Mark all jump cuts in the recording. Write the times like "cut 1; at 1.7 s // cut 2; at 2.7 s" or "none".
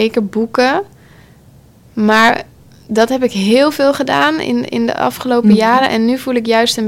none